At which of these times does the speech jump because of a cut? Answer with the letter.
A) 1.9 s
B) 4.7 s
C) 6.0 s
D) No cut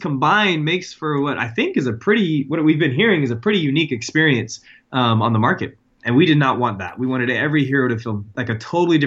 C